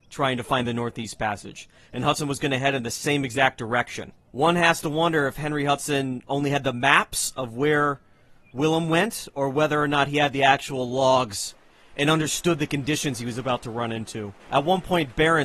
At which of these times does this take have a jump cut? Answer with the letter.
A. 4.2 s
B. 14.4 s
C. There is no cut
B